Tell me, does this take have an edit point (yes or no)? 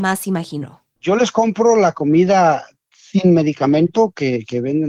yes